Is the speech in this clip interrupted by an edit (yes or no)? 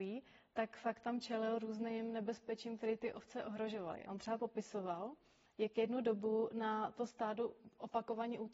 no